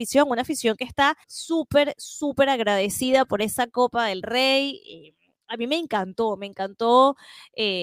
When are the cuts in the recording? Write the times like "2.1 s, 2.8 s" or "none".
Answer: 1.2 s